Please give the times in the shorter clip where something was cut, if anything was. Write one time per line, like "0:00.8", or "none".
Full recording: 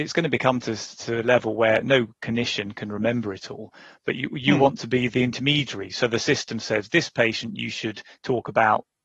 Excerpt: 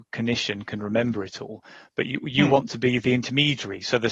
none